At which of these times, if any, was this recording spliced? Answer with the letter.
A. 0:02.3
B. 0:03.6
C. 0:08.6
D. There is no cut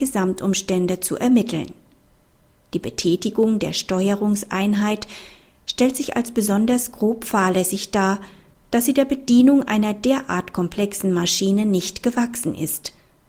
C